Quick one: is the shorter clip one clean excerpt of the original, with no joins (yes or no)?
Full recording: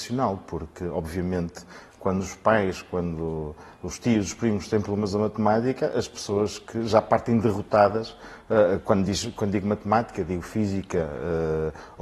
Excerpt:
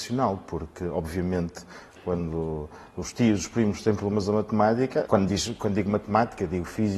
no